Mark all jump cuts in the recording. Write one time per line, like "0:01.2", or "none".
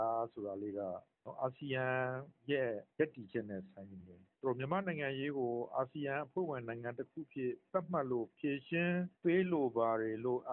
0:02.9
0:04.3